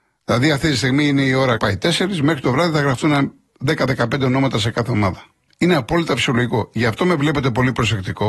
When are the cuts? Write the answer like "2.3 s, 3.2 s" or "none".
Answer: 1.6 s